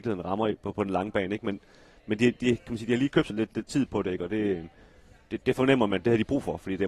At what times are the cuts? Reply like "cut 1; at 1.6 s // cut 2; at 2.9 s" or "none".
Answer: cut 1; at 3.3 s // cut 2; at 5.4 s

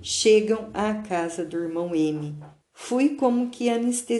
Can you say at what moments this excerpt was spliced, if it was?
cut 1; at 2.6 s

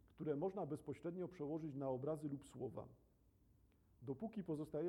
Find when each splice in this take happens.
none

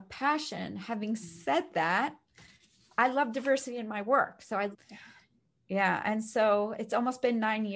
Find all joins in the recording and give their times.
cut 1; at 4.7 s

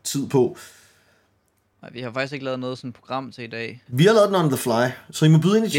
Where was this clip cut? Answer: cut 1; at 1.7 s // cut 2; at 3.9 s

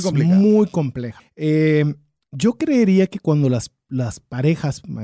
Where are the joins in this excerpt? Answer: cut 1; at 1.2 s

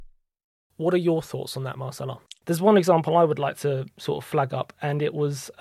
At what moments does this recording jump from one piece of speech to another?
cut 1; at 2.4 s

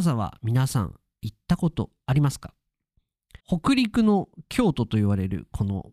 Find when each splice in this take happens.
cut 1; at 3.4 s

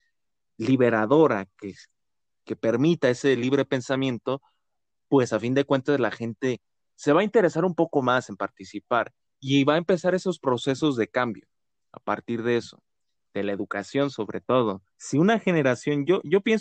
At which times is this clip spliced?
cut 1; at 9.3 s // cut 2; at 13.3 s // cut 3; at 14.9 s

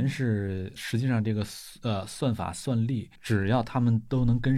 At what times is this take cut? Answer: cut 1; at 3.1 s

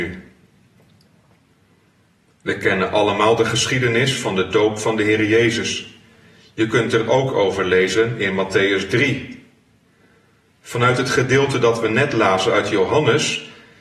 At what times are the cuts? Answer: none

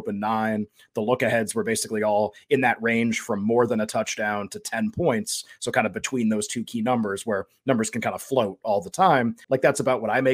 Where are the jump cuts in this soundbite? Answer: cut 1; at 9.4 s

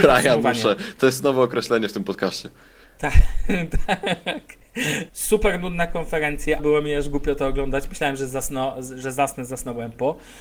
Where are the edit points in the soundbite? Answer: cut 1; at 5.1 s // cut 2; at 6.6 s

